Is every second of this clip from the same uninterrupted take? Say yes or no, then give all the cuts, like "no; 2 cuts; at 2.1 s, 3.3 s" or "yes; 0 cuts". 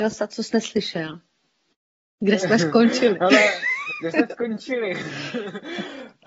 yes; 0 cuts